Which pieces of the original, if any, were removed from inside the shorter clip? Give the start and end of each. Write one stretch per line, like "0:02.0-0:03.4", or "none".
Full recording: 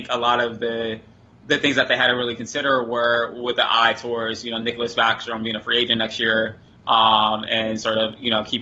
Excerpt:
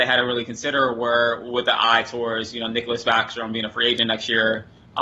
none